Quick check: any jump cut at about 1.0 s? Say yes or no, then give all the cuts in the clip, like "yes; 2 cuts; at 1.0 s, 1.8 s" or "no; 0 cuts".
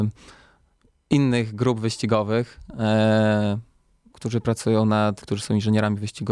no; 2 cuts; at 4.1 s, 5.2 s